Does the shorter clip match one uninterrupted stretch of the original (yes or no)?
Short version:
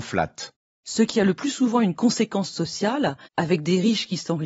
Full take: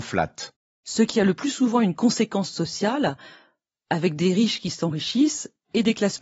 no